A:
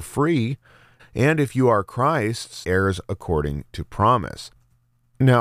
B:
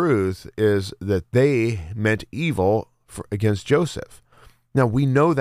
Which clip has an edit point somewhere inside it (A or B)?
A